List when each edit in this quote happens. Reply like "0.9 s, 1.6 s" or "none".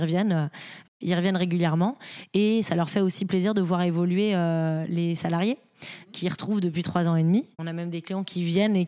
7.5 s